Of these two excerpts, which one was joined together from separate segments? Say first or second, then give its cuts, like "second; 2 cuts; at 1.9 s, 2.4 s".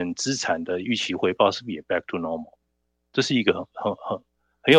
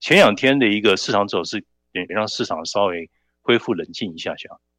second; 1 cut; at 2.1 s